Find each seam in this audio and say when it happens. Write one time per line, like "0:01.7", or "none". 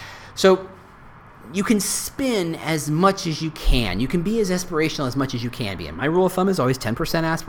none